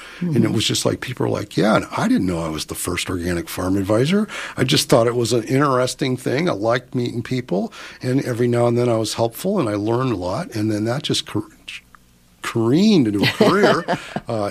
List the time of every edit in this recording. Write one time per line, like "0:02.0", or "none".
none

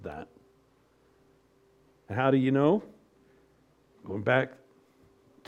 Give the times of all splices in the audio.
0:03.9

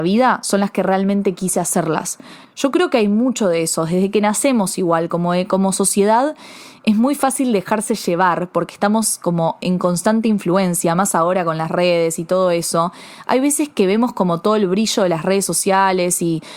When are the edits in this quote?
0:02.4

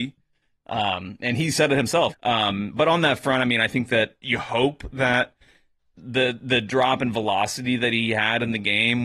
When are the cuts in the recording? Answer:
0:02.1
0:04.2

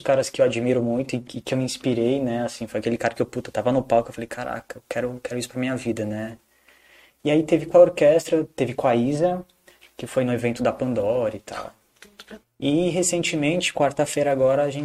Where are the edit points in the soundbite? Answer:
0:12.4

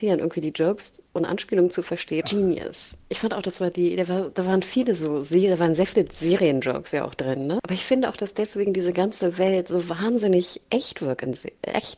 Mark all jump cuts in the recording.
0:02.2
0:07.6

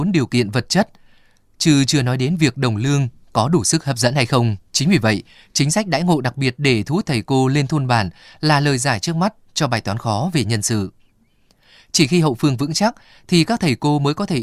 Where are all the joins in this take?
0:04.6

